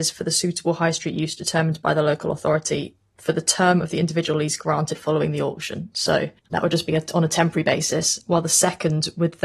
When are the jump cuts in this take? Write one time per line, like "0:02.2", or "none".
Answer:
0:06.4